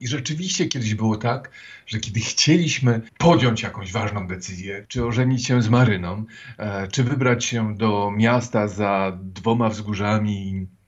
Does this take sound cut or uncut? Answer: cut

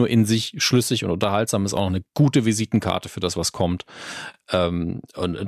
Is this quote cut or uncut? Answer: uncut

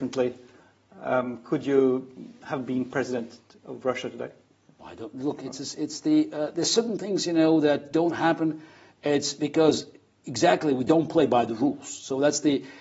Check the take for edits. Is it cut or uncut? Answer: uncut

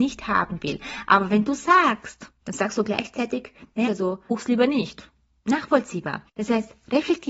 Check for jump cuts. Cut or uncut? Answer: cut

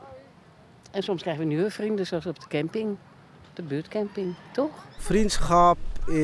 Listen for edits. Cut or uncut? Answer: cut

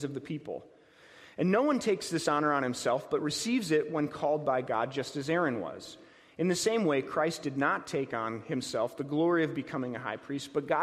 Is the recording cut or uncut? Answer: uncut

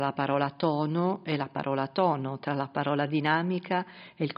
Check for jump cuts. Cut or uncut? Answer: uncut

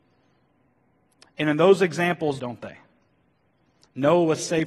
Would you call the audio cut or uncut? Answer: cut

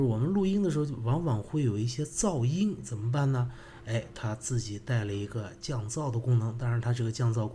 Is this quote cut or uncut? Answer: uncut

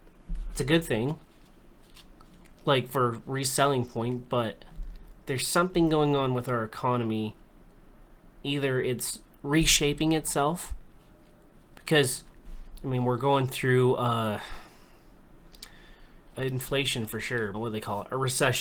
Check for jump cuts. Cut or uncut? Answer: cut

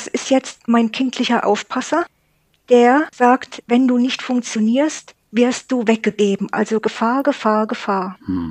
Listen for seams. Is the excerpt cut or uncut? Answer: uncut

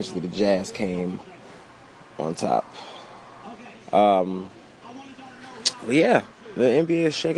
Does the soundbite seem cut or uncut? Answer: cut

